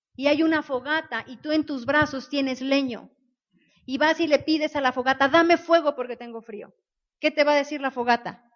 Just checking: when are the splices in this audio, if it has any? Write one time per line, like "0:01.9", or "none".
none